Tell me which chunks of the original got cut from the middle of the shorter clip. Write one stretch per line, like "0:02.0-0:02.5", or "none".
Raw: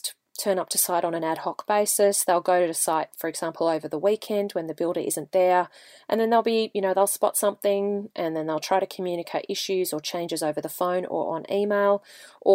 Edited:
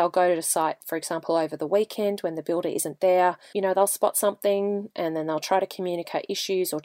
0:05.8-0:06.7